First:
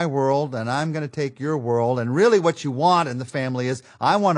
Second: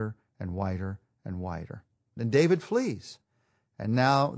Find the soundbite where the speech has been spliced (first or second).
second